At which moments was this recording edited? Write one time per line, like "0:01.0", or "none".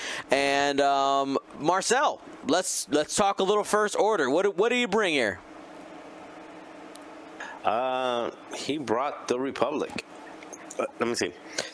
none